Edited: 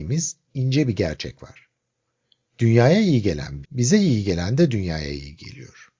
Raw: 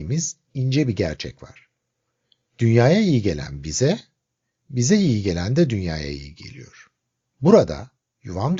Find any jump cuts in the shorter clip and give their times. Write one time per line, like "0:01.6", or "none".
0:03.6